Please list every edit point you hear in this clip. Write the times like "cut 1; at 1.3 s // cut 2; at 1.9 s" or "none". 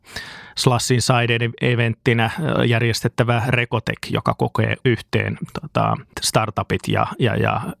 cut 1; at 4.8 s // cut 2; at 6.1 s